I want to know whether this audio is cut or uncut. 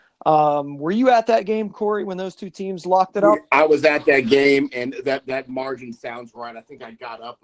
uncut